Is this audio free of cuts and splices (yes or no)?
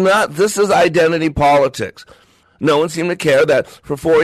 no